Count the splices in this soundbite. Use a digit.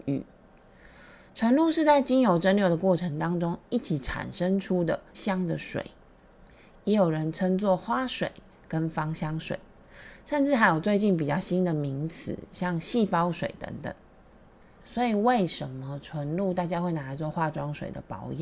2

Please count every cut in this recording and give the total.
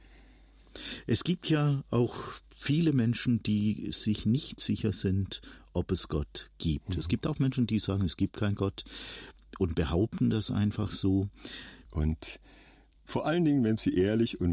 1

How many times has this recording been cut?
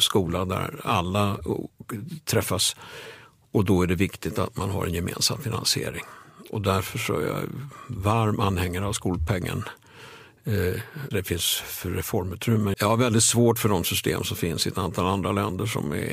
2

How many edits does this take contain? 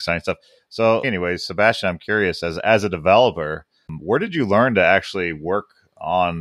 1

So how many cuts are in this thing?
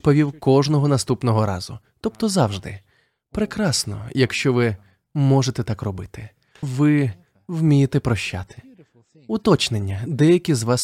1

